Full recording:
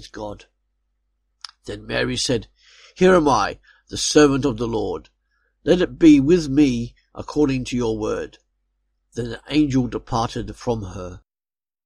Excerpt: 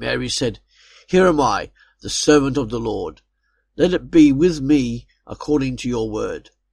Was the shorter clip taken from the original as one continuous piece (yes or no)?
yes